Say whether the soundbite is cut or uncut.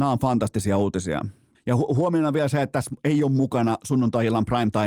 cut